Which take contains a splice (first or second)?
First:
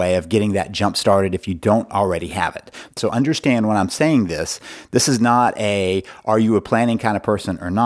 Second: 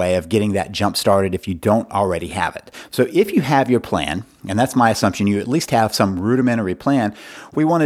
first